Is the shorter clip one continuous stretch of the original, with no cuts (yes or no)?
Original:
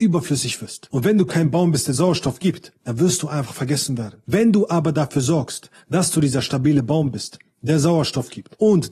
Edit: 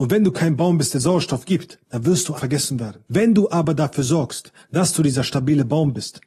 no